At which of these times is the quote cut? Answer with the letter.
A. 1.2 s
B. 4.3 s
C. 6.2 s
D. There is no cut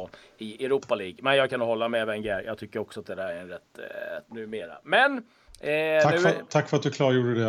B